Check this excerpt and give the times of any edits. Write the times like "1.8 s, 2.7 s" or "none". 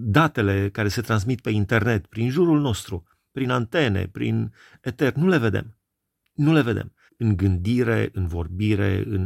7.1 s